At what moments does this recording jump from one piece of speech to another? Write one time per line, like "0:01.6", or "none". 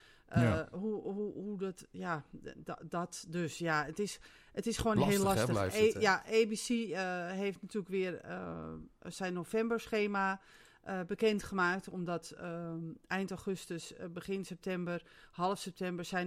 none